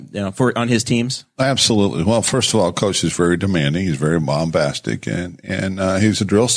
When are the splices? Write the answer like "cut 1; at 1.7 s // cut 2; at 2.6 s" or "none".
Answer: none